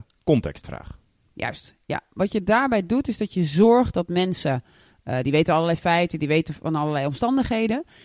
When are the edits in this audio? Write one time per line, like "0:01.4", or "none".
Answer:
none